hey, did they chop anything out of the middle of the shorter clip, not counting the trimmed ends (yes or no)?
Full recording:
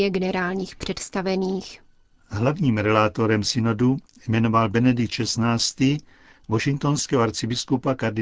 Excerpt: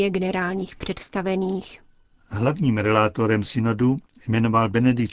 no